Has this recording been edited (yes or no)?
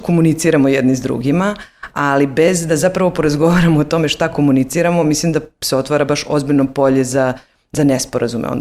no